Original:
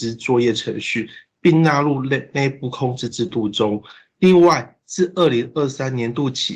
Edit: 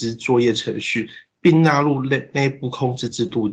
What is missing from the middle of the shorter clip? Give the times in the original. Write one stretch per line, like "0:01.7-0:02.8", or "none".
none